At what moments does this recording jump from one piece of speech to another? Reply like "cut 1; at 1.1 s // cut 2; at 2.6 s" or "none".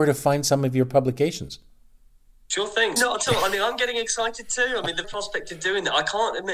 cut 1; at 3.0 s // cut 2; at 5.0 s